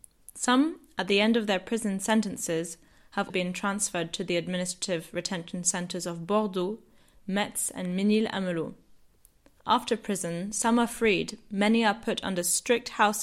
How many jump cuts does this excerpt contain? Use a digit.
1